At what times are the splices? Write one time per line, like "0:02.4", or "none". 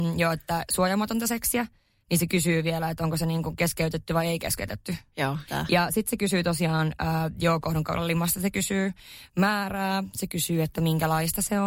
0:05.5